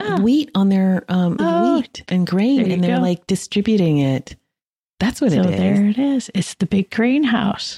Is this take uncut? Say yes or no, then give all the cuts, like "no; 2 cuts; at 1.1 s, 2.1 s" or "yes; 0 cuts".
no; 1 cut; at 1.4 s